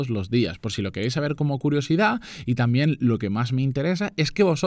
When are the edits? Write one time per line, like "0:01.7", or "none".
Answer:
none